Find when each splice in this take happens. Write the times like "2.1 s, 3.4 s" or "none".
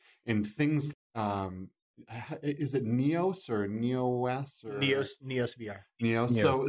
0.9 s

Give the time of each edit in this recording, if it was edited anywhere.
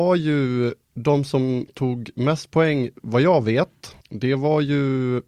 4.0 s

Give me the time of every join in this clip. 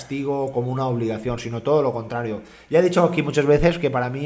none

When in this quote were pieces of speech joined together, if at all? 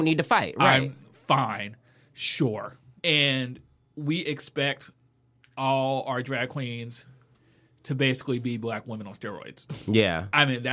3.0 s

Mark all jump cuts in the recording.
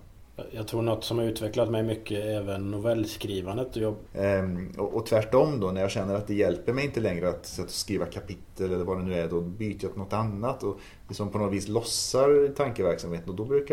4.1 s

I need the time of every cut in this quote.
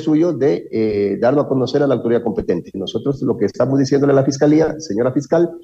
2.7 s

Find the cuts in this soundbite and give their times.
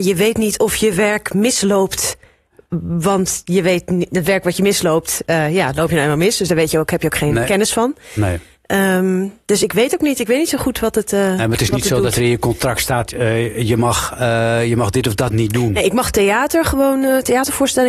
none

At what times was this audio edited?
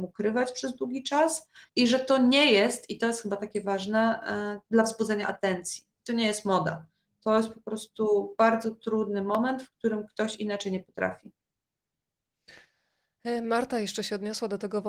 1.7 s

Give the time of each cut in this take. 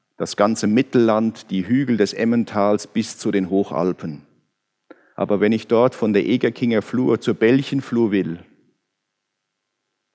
5.1 s

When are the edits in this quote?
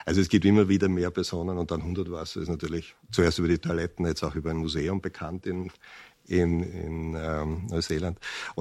none

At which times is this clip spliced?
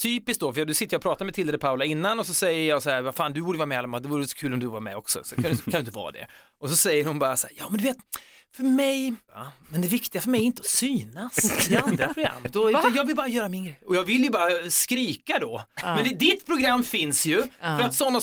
9.3 s

